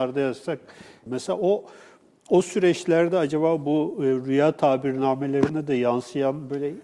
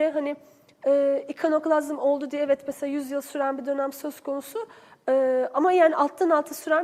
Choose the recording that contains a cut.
first; 1 cut; at 1.1 s

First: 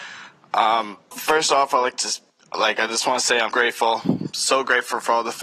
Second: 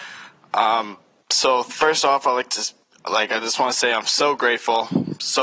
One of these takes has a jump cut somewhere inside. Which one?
first; 2 cuts; at 1.1 s, 3.5 s

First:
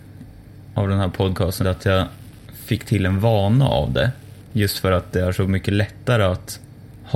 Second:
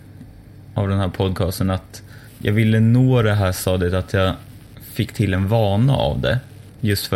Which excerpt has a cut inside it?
first; 1 cut; at 1.6 s

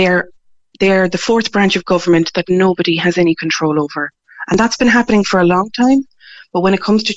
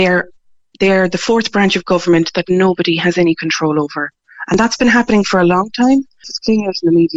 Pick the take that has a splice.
second; 1 cut; at 6.2 s

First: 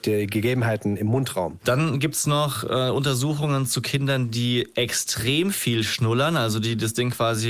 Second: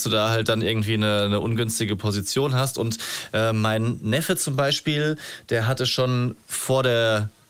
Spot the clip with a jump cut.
first; 1 cut; at 1.6 s

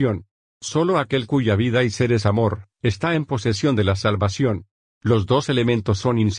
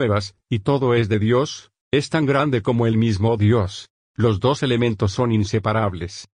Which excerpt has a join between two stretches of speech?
second; 2 cuts; at 1.8 s, 3.9 s

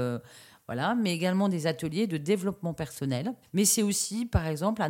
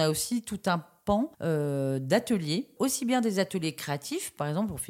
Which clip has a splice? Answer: second; 2 cuts; at 1.3 s, 2.8 s

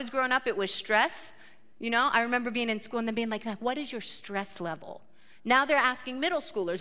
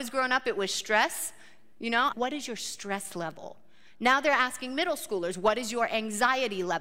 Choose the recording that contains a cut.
second; 1 cut; at 2.1 s

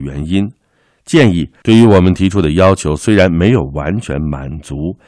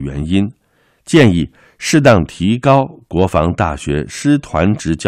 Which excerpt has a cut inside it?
first; 1 cut; at 1.6 s

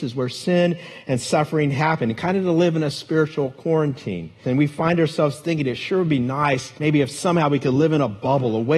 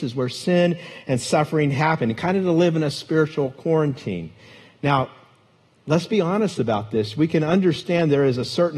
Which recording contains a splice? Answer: first; 2 cuts; at 4.4 s, 6.8 s

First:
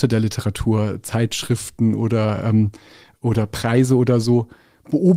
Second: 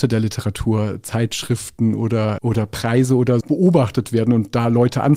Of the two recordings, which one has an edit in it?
second; 2 cuts; at 2.4 s, 3.4 s

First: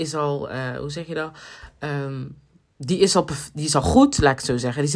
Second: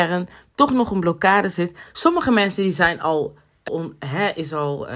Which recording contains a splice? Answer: second; 2 cuts; at 1.9 s, 3.7 s

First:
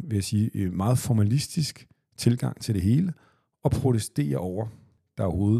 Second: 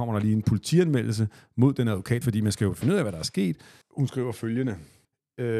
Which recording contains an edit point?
second; 2 cuts; at 2.2 s, 3.8 s

